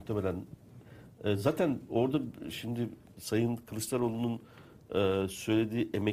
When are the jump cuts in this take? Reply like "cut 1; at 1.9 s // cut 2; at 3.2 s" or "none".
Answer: none